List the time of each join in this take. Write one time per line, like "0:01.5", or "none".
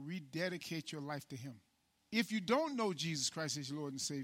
0:02.0